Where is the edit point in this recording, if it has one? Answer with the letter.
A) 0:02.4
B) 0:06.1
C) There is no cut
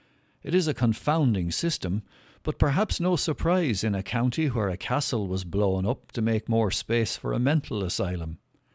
B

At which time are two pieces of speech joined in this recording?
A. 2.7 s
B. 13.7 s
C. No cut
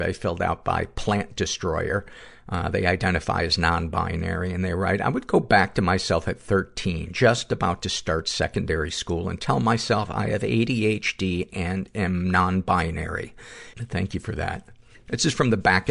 B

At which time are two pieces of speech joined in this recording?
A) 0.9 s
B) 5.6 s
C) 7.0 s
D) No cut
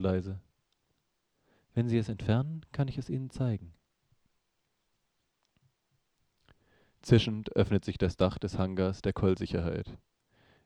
D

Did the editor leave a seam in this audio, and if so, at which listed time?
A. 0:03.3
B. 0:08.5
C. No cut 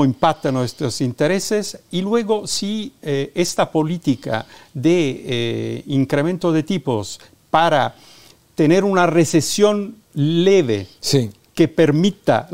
C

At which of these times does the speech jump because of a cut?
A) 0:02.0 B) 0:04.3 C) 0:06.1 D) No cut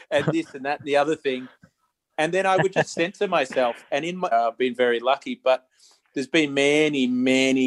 B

